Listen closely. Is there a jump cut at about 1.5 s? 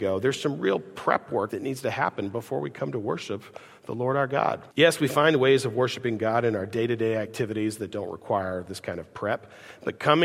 yes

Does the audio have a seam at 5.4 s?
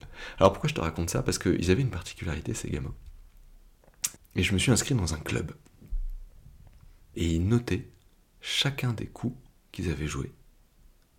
no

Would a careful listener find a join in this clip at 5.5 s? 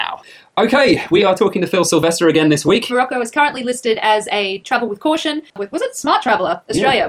yes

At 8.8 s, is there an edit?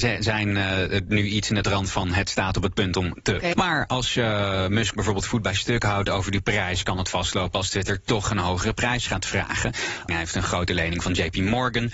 no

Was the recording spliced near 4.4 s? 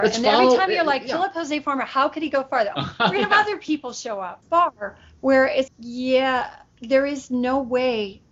yes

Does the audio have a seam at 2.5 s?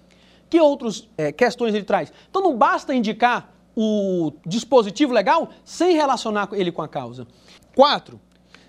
no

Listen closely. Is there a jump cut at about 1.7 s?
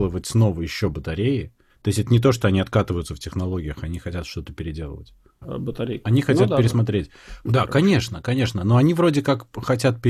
no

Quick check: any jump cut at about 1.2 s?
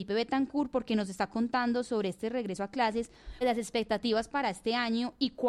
no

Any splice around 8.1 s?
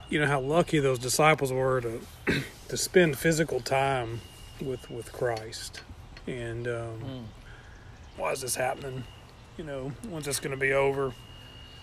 yes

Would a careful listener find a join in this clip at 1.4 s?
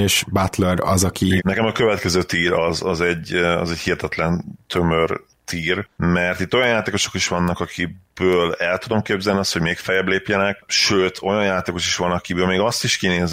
yes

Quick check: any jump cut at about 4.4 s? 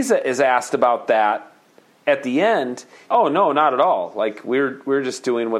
no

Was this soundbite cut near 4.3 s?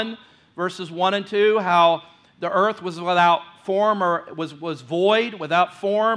no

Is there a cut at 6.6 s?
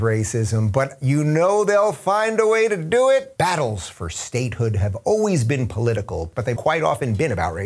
yes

